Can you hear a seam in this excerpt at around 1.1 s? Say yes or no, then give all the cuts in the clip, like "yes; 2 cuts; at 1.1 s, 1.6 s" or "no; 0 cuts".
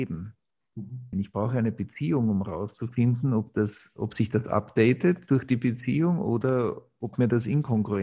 yes; 1 cut; at 1.1 s